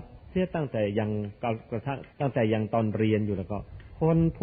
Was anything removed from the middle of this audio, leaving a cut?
yes; 1 cut; at 2.1 s

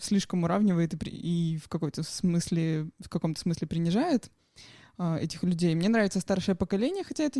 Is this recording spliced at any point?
no; 0 cuts

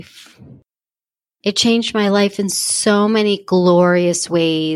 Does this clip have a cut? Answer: no; 0 cuts

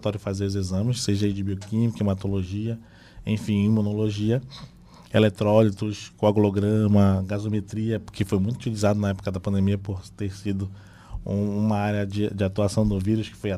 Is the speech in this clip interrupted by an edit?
no; 0 cuts

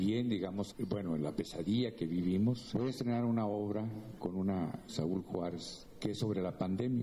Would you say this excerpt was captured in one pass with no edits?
no; 2 cuts; at 2.7 s, 4.9 s

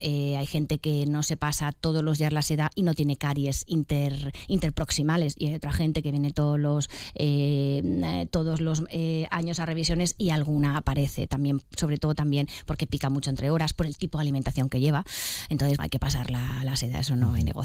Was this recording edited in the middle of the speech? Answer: yes; 1 cut; at 15.8 s

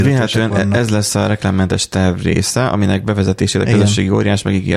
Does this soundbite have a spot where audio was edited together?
no; 0 cuts

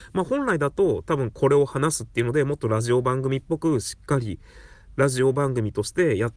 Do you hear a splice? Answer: no; 0 cuts

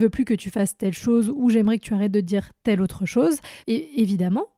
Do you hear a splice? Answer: yes; 1 cut; at 3.6 s

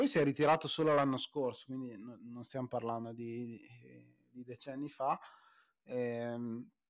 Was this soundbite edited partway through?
no; 0 cuts

